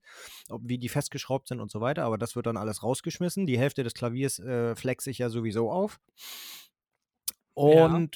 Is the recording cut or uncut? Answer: uncut